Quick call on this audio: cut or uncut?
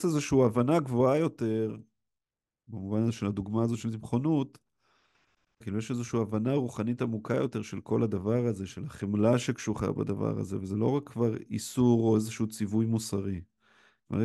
cut